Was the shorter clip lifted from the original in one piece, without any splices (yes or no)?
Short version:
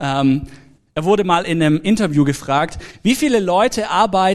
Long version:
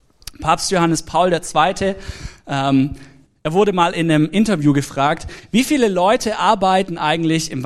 yes